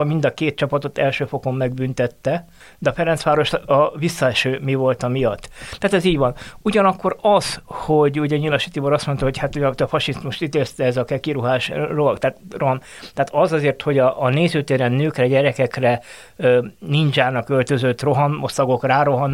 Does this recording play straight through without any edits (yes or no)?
yes